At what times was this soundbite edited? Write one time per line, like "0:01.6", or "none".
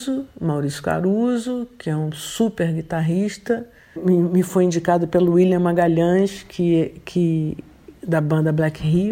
0:04.0